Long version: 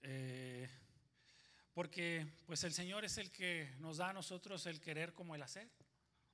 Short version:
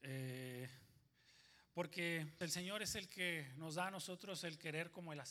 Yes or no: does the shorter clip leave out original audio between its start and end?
yes